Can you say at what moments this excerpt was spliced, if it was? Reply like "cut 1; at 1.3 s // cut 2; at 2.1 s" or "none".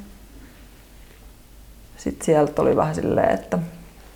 cut 1; at 1.8 s